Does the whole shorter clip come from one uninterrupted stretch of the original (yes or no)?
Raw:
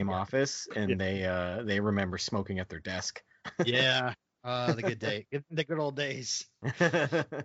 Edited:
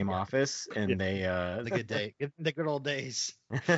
no